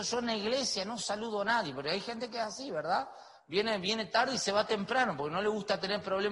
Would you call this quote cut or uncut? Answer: uncut